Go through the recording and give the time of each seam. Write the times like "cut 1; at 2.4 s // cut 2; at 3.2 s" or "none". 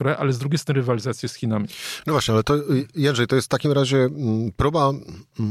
none